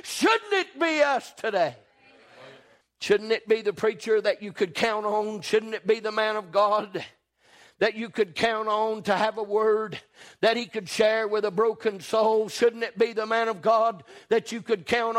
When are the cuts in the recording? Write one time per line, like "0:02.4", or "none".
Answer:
0:02.8